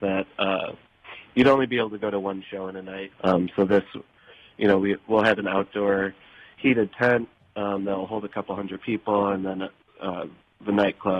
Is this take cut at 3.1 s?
yes; 1 cut; at 3.1 s

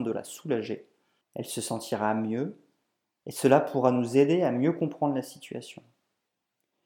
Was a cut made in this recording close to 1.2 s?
yes; 1 cut; at 1.2 s

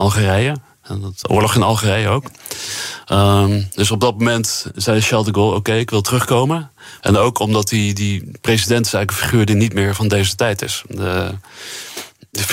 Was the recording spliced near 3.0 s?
no; 2 cuts; at 1.2 s, 7.0 s

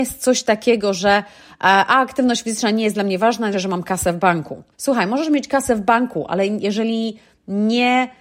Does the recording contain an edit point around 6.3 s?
no; 2 cuts; at 3.5 s, 4.7 s

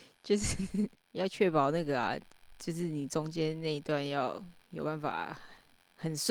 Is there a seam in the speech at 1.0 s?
yes; 1 cut; at 1.0 s

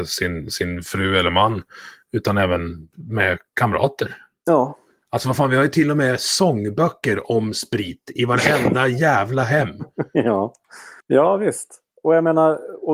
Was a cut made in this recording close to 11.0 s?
yes; 1 cut; at 11.0 s

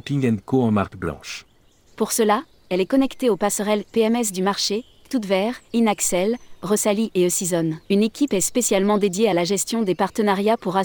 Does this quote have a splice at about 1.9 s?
yes; 2 cuts; at 1.9 s, 7.8 s

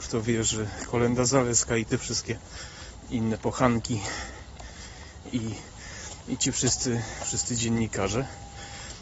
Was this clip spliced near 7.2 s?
no; 1 cut; at 5.3 s

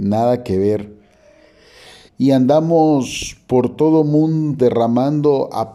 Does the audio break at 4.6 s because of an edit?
yes; 2 cuts; at 2.1 s, 4.6 s

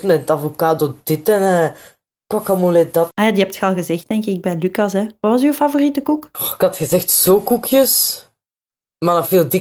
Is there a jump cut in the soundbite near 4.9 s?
no; 1 cut; at 3.1 s

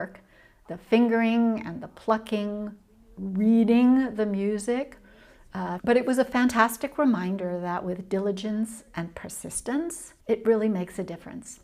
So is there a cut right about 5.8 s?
yes; 2 cuts; at 5.8 s, 10.2 s

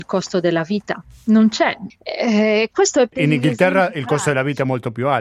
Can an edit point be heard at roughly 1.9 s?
yes; 1 cut; at 1.9 s

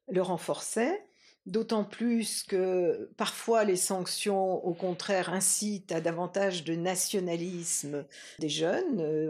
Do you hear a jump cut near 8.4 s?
yes; 1 cut; at 8.4 s

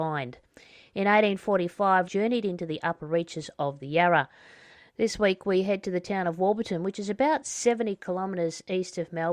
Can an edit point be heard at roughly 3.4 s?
no; 2 cuts; at 2.0 s, 4.9 s

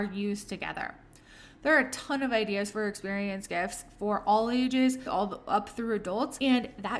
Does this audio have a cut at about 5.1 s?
yes; 1 cut; at 5.1 s

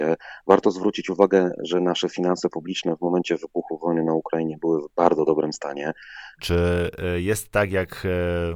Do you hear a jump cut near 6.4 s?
yes; 1 cut; at 6.4 s

